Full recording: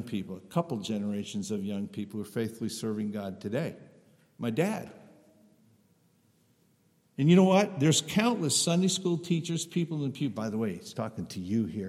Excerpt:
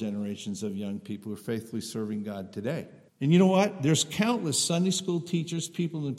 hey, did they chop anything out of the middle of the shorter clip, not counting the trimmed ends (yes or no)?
yes